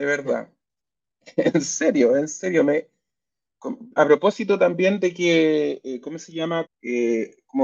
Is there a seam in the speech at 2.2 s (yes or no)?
no